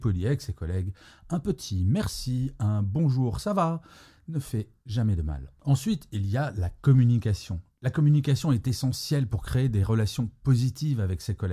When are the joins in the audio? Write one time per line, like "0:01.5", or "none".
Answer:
none